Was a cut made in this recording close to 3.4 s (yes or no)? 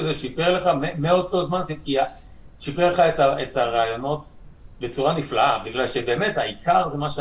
no